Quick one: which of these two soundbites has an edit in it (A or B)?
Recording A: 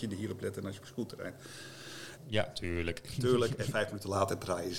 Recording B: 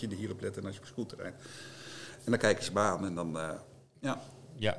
A